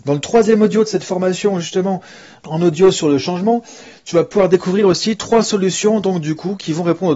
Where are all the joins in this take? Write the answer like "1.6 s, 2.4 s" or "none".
2.4 s